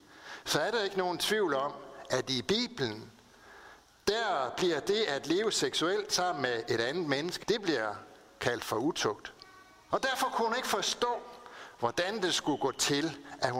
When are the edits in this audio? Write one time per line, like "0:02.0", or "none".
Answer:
0:07.4
0:09.9